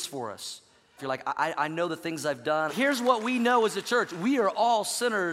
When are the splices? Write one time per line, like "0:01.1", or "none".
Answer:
0:01.0
0:02.7

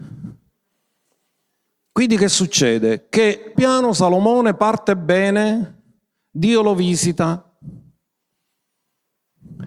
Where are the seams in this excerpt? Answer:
0:03.5

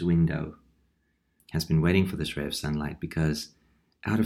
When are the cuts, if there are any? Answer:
0:01.4

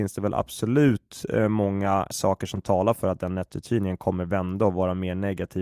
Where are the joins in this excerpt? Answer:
0:02.1

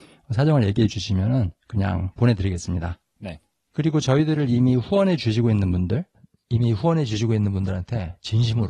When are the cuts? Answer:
none

